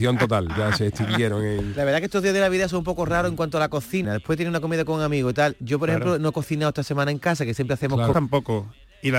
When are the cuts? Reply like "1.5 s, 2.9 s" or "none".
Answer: 4.0 s, 8.1 s